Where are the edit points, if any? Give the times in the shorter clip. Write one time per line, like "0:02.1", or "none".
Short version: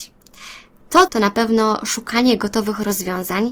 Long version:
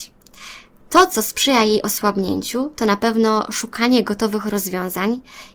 0:01.1